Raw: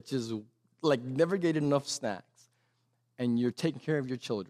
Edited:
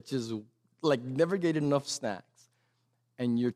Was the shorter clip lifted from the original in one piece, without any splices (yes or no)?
yes